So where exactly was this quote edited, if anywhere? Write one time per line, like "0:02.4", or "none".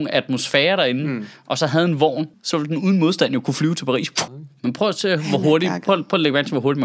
0:02.3
0:04.3